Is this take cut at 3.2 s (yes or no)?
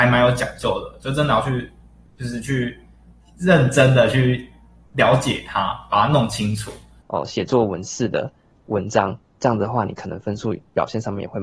no